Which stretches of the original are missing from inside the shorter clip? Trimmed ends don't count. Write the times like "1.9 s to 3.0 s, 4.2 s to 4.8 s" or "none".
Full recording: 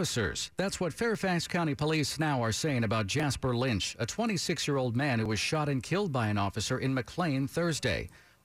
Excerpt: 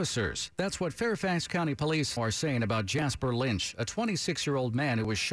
2.2 s to 2.4 s